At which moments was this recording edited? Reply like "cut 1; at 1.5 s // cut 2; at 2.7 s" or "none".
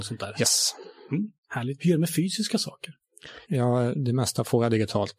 cut 1; at 1.8 s // cut 2; at 3.4 s